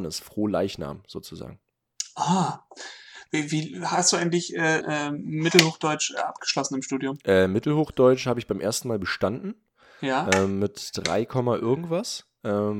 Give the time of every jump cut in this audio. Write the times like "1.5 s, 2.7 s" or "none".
4.8 s